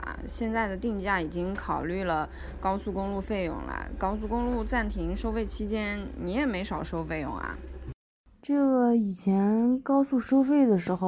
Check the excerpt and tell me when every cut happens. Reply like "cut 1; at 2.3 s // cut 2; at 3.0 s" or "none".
none